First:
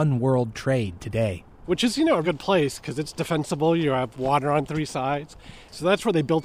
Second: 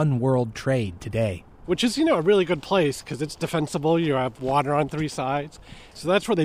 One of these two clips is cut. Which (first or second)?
first